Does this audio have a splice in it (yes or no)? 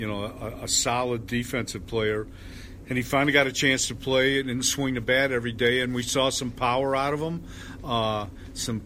no